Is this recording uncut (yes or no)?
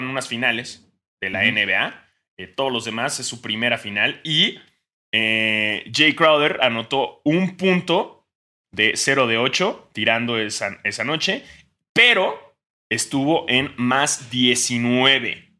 yes